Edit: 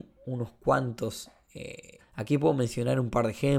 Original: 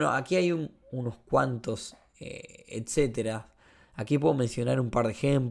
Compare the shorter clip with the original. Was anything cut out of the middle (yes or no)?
yes